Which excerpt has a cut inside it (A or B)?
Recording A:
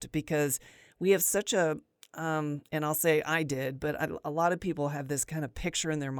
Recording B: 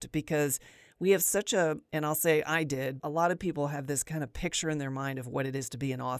B